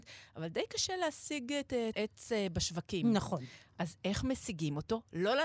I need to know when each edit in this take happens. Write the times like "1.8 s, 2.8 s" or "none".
1.9 s

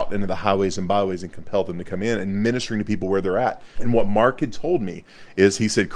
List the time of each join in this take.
3.8 s

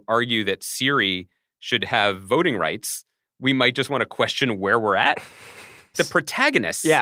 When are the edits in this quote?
5.9 s

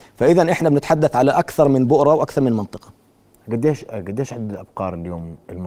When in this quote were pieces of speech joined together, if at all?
none

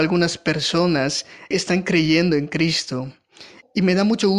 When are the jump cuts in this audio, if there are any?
1.5 s

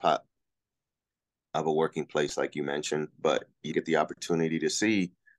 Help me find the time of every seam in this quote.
3.7 s

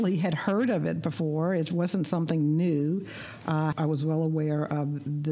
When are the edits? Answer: 3.7 s

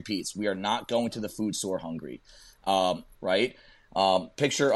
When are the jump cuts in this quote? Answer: 3.1 s

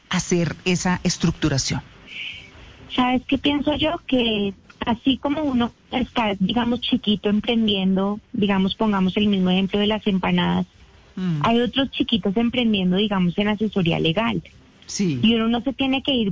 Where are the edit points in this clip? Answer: none

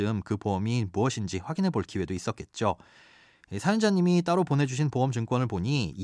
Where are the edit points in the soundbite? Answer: none

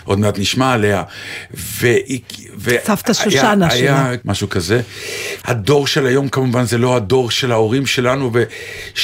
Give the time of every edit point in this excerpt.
4.2 s, 5.4 s

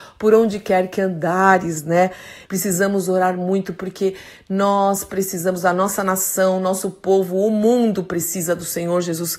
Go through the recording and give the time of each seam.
2.5 s

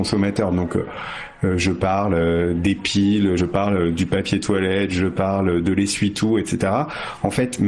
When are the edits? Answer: none

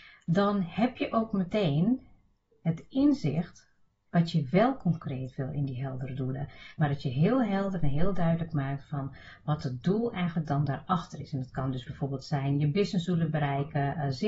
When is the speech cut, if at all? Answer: 6.8 s

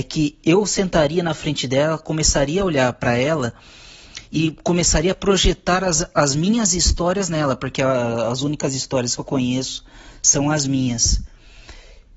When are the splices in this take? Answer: none

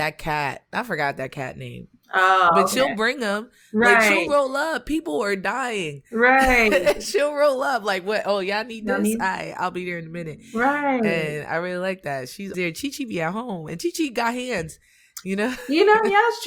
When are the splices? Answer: 12.5 s

